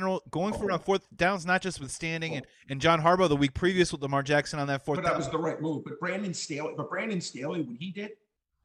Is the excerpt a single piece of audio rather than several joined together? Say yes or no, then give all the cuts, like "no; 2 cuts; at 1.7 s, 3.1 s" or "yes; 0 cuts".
yes; 0 cuts